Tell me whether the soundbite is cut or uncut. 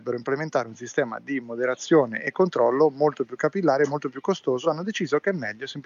uncut